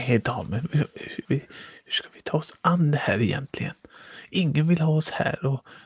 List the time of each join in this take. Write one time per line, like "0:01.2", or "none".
0:01.2